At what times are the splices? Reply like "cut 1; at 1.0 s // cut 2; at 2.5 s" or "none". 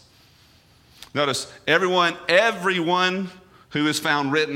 none

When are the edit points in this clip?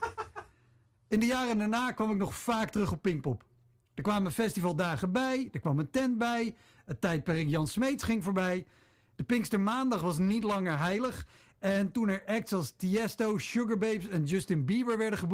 none

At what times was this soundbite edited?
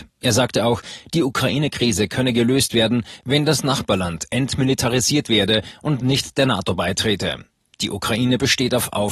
none

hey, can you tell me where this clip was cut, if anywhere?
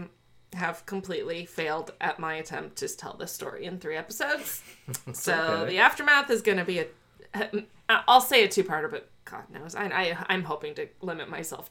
none

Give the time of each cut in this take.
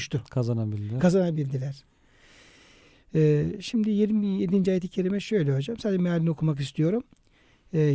none

